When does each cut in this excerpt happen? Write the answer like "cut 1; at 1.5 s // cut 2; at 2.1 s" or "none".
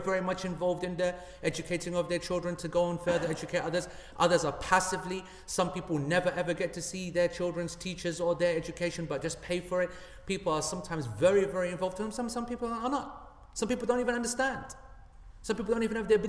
none